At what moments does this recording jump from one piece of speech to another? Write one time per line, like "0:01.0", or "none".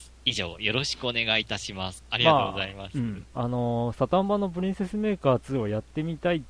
0:02.0

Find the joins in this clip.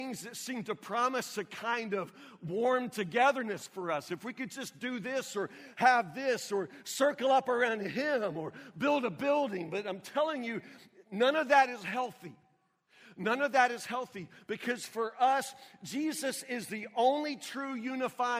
none

